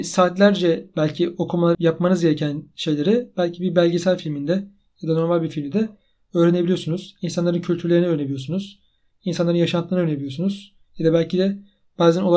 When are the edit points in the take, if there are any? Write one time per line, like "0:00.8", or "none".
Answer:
0:01.7